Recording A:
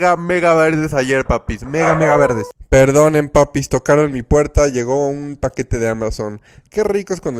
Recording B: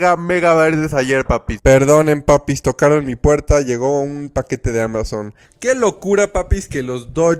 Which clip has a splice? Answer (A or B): B